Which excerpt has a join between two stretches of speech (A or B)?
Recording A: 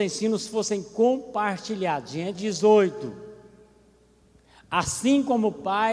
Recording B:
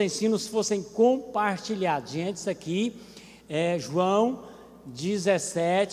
A